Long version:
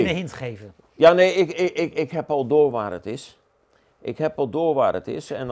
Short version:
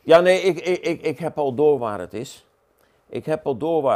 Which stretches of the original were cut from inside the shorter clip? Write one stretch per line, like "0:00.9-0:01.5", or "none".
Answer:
none